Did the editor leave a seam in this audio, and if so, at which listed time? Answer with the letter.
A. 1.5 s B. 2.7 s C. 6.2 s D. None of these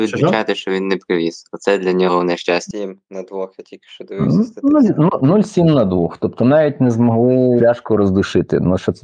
B